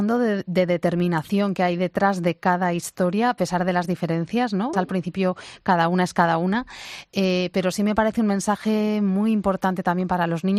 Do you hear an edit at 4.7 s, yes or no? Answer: yes